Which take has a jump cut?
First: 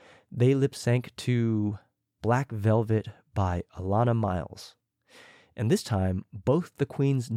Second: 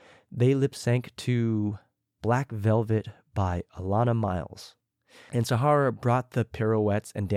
second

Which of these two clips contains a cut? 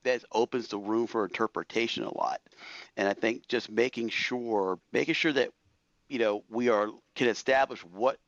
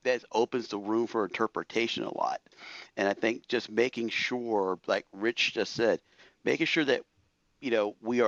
first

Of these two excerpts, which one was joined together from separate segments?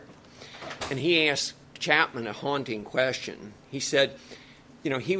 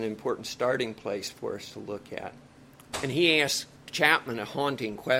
second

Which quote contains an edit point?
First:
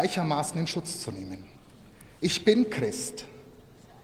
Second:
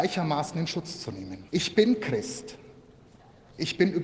second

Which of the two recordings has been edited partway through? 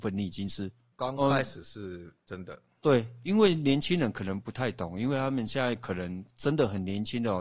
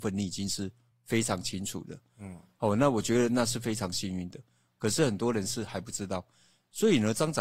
first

